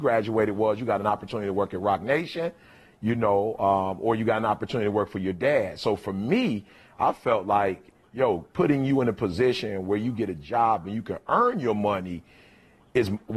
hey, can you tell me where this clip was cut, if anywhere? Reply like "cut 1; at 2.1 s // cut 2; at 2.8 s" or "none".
none